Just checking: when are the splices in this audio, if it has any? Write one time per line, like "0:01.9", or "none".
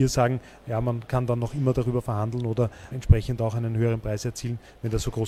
0:02.9